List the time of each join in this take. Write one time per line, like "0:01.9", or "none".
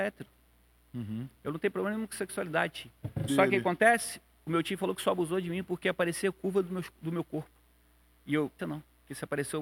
0:03.3
0:08.6